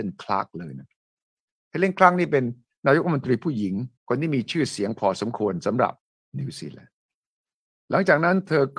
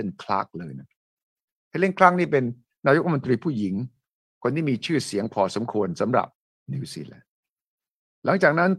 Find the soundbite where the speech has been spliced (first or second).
first